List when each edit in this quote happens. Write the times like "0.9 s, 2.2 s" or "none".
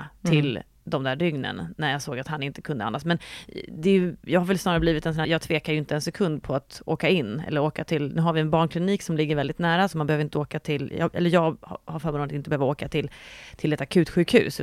5.2 s